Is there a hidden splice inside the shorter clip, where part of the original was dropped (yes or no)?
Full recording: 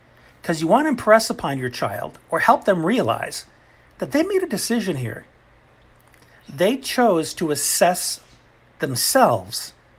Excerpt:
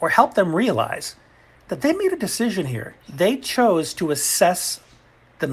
yes